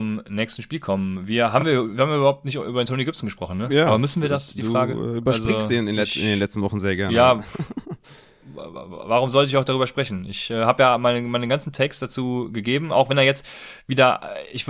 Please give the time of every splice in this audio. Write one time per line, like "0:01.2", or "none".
none